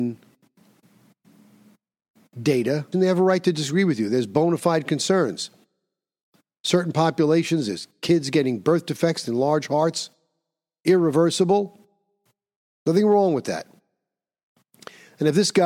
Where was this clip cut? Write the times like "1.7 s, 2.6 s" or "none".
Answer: 2.9 s